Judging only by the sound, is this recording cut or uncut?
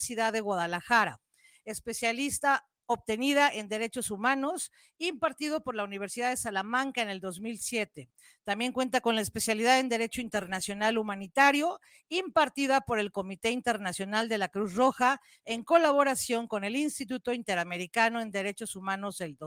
uncut